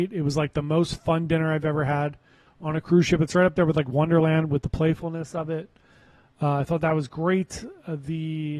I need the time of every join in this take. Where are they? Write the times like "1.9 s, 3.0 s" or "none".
none